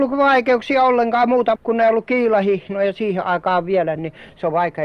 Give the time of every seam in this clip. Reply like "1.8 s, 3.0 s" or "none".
1.6 s, 4.0 s